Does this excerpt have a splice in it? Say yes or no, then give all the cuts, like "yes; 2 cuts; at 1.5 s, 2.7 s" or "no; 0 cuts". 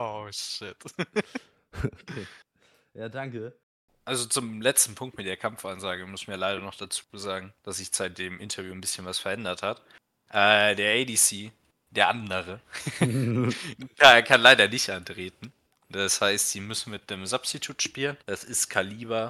yes; 1 cut; at 18.2 s